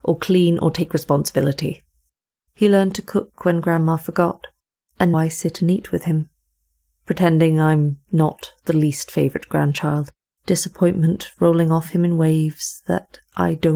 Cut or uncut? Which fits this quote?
cut